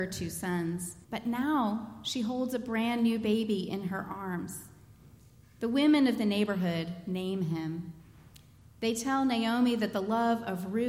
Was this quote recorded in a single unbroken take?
no; 1 cut; at 1.0 s

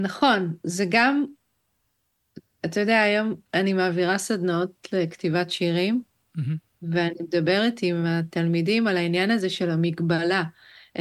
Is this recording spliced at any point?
no; 0 cuts

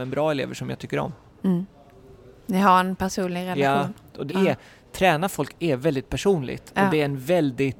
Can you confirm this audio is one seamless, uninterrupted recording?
no; 1 cut; at 4.3 s

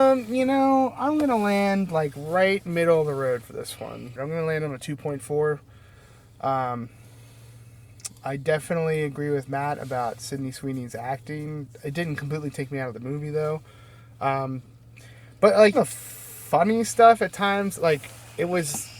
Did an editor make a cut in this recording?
yes; 2 cuts; at 4.2 s, 15.7 s

